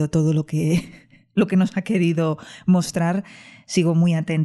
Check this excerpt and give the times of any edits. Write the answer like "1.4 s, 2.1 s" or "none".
none